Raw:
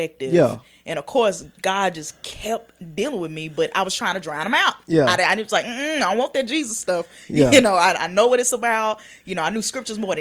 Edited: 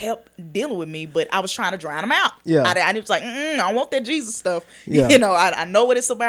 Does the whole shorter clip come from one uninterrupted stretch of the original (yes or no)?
yes